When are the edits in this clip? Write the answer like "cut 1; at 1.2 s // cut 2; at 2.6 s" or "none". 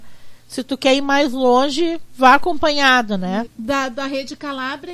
cut 1; at 3.5 s